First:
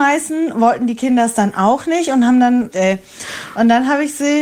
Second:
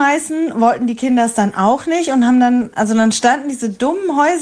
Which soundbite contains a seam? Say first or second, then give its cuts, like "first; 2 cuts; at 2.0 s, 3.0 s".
first; 1 cut; at 2.7 s